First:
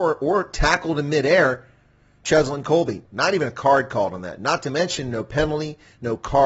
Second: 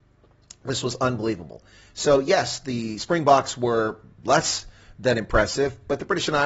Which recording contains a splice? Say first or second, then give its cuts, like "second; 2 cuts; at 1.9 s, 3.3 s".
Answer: first; 1 cut; at 3.1 s